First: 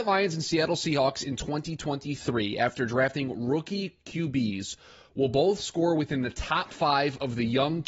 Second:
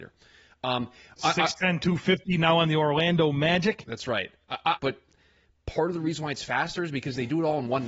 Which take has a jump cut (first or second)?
second